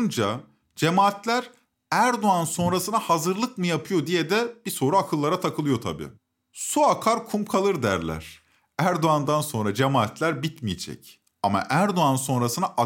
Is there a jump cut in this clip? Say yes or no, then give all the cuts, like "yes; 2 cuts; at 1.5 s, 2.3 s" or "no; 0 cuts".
no; 0 cuts